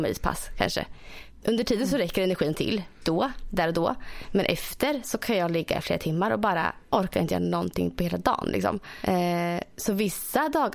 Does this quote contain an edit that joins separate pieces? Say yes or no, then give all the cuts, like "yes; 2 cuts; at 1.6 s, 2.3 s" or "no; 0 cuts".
yes; 1 cut; at 3.0 s